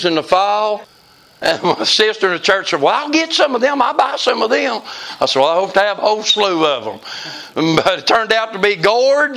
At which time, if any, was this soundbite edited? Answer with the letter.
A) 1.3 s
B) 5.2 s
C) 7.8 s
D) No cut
D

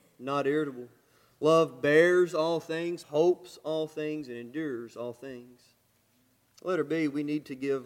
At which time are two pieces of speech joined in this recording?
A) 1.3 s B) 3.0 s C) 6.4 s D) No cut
B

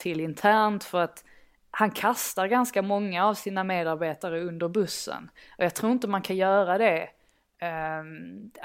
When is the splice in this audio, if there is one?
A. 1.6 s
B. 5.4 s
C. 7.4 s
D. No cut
D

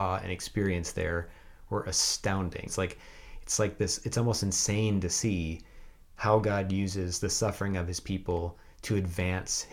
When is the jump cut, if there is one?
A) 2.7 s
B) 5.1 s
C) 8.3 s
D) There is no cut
A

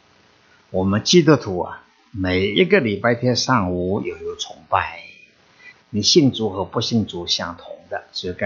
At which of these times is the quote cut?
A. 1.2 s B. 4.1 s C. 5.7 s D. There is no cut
C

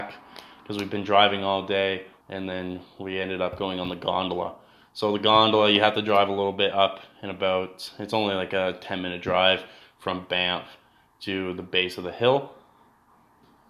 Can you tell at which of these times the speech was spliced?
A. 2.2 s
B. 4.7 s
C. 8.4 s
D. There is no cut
A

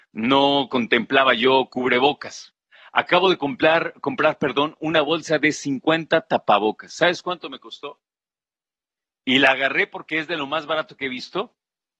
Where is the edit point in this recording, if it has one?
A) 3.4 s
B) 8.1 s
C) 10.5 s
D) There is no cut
D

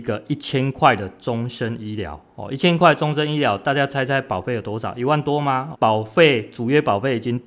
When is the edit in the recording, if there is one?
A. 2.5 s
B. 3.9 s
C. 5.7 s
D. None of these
C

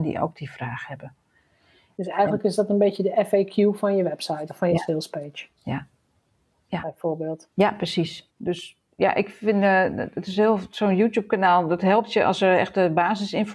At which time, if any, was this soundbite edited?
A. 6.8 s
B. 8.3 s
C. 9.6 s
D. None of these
B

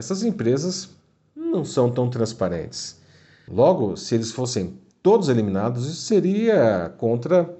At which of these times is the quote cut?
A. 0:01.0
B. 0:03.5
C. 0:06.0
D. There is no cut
B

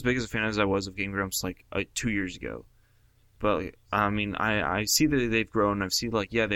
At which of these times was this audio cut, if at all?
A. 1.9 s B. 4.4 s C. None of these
C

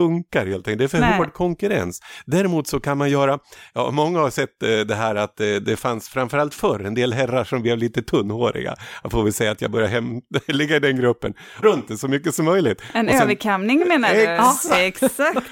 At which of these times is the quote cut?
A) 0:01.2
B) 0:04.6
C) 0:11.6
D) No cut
C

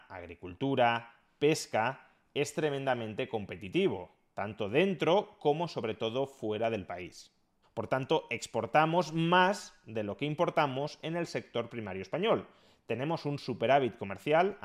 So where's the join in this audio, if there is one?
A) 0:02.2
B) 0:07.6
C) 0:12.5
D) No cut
B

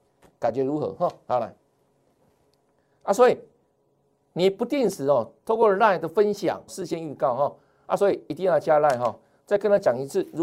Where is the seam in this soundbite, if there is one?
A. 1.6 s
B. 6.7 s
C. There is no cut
B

